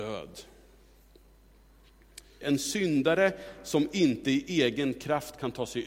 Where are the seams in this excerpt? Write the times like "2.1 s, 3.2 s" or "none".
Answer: 2.4 s